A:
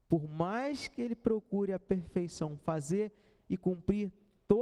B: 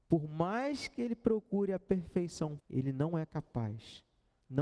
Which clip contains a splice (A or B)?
B